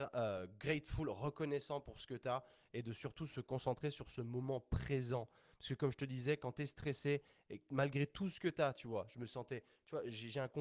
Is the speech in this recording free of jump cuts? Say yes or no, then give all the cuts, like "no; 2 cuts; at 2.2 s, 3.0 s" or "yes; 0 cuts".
yes; 0 cuts